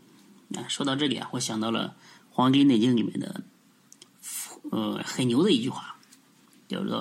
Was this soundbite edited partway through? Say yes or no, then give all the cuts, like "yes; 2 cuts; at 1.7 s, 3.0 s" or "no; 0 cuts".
no; 0 cuts